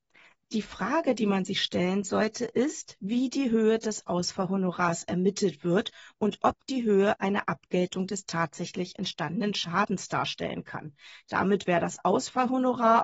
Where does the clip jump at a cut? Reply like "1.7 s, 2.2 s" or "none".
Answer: 11.2 s